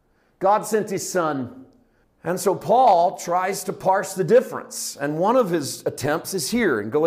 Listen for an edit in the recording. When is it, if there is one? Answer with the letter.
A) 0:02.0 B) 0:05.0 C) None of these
A